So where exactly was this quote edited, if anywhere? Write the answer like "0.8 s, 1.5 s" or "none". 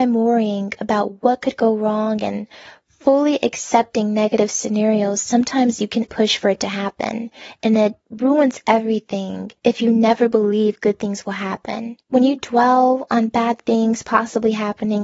6.1 s, 9.6 s, 12.0 s